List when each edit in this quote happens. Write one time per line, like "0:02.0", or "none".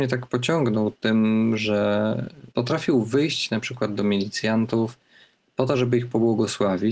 0:02.5